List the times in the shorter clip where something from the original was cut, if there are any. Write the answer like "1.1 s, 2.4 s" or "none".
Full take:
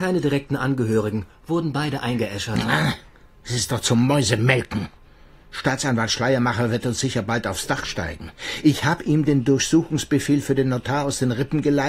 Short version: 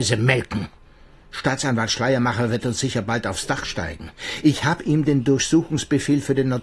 none